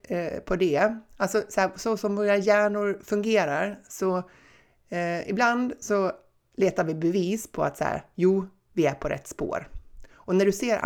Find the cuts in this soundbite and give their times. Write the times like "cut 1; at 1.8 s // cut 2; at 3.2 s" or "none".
none